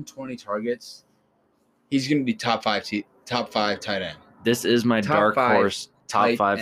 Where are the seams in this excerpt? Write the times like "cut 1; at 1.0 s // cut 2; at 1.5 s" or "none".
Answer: none